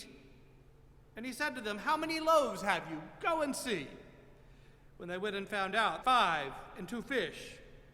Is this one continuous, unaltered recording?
no; 1 cut; at 6.0 s

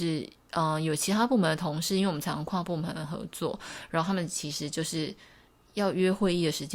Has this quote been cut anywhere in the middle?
no; 0 cuts

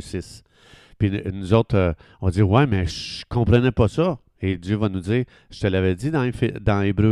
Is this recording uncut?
yes; 0 cuts

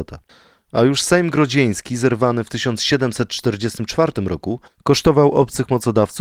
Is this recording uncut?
yes; 0 cuts

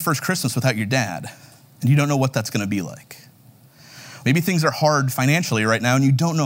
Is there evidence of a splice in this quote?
yes; 1 cut; at 4.2 s

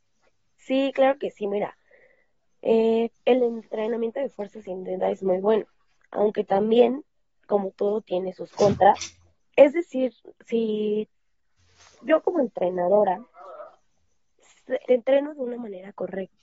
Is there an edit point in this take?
yes; 3 cuts; at 3.1 s, 9.4 s, 14.8 s

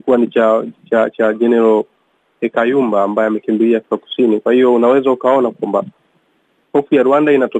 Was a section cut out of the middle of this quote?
no; 0 cuts

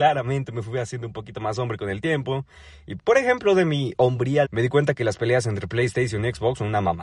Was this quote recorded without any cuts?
no; 2 cuts; at 3.0 s, 4.4 s

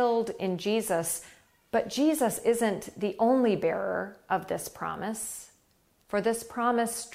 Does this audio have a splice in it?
no; 0 cuts

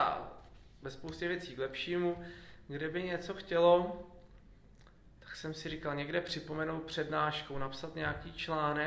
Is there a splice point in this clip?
yes; 1 cut; at 5.2 s

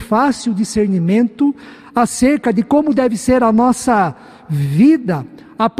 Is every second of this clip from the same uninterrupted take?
yes; 0 cuts

